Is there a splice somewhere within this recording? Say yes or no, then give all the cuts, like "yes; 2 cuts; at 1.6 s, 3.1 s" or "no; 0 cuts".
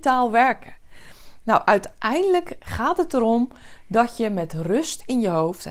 no; 0 cuts